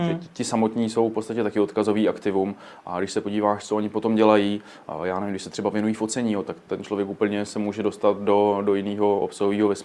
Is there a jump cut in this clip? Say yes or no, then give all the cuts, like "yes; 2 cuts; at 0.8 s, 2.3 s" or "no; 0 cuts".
no; 0 cuts